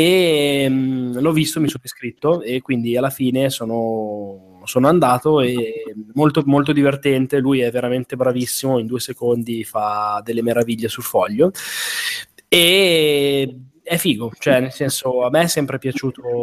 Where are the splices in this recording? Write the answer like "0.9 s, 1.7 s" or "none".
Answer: none